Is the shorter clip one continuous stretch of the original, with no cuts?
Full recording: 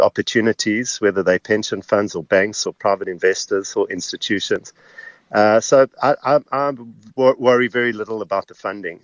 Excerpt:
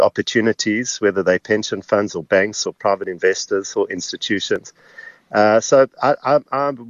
yes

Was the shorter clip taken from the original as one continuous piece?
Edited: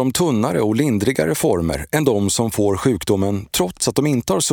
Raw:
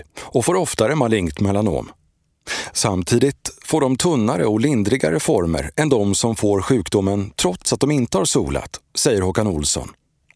yes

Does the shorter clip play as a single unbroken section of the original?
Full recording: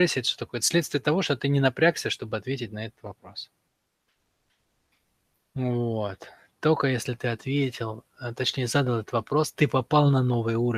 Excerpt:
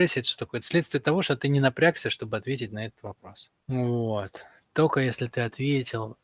no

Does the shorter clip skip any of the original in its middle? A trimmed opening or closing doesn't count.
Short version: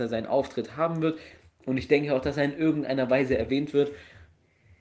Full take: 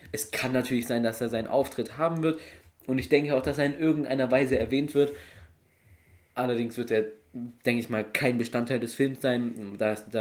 no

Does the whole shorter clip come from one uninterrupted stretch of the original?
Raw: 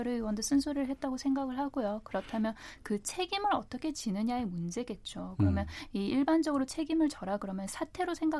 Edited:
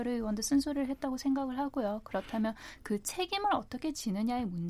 yes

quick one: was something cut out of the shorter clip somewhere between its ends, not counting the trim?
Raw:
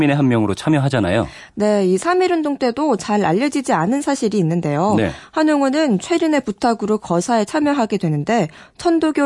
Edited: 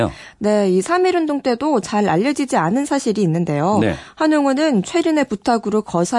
no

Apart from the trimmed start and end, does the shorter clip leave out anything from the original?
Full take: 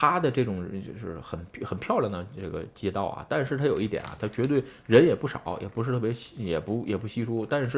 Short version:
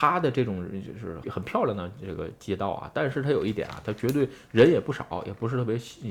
yes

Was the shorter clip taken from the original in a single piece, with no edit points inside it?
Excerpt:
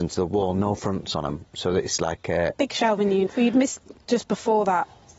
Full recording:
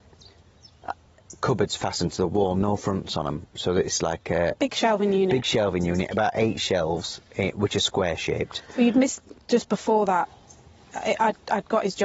no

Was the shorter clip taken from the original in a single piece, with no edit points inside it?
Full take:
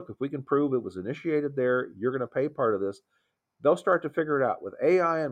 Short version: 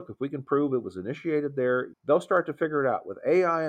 no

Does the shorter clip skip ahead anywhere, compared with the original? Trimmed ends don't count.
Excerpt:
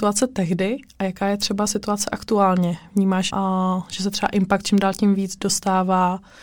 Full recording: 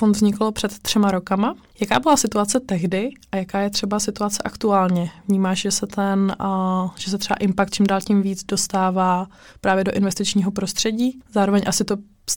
yes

